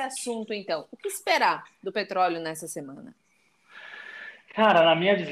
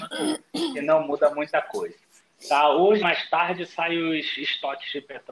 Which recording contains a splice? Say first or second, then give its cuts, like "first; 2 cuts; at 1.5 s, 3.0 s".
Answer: second; 1 cut; at 3.0 s